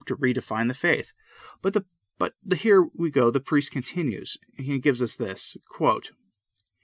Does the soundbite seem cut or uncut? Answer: uncut